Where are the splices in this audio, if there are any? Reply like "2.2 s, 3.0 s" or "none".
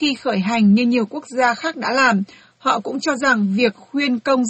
none